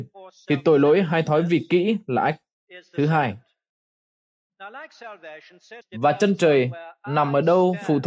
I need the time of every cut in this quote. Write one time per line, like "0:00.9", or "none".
0:05.8